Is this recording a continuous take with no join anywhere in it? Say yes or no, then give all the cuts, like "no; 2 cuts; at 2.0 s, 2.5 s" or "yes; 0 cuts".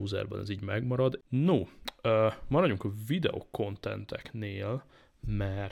no; 1 cut; at 1.2 s